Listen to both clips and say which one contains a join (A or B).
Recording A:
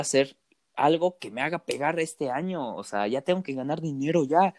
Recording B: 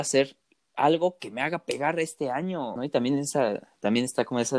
B